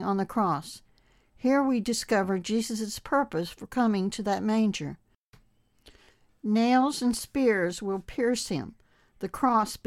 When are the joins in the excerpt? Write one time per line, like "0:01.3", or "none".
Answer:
none